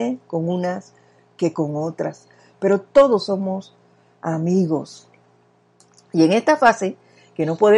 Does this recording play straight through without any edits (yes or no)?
yes